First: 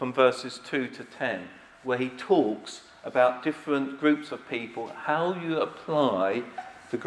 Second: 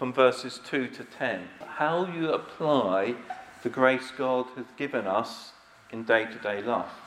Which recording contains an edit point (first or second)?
second